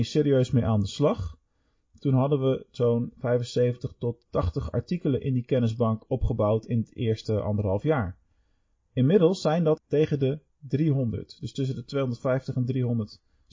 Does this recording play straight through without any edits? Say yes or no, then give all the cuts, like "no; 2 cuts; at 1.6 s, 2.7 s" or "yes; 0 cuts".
no; 1 cut; at 9.8 s